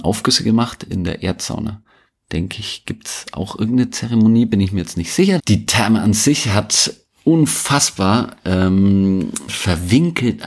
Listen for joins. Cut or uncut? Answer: cut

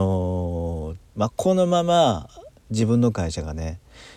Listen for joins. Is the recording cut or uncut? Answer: cut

